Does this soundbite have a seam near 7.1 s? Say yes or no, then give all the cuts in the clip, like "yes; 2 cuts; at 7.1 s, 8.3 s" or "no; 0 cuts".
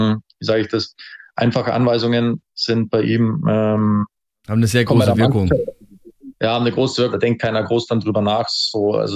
yes; 1 cut; at 7.1 s